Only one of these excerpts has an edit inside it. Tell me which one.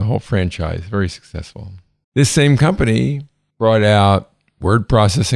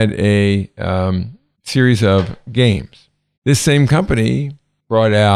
second; 1 cut; at 3.4 s

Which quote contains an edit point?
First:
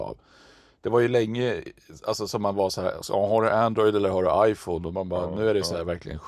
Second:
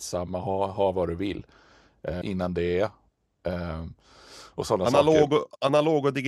second; 1 cut; at 2.2 s

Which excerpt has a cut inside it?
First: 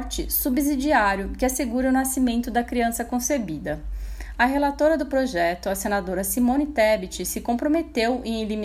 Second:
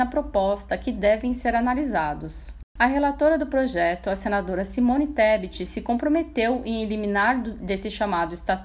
second; 1 cut; at 2.8 s

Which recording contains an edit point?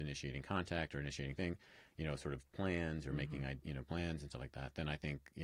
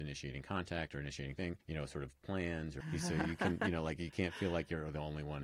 second; 2 cuts; at 1.6 s, 2.8 s

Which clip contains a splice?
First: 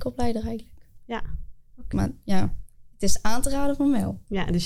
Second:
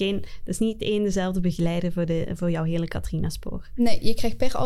first; 1 cut; at 1.9 s

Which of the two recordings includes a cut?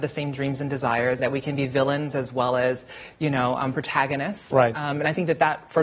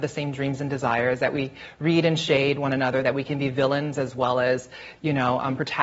first; 1 cut; at 1.2 s

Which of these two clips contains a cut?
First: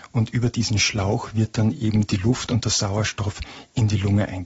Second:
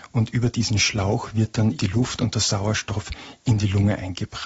second; 1 cut; at 1.8 s

